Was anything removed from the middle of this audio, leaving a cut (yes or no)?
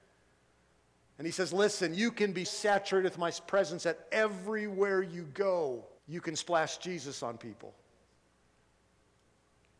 yes